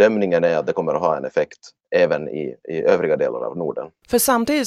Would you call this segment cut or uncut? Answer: uncut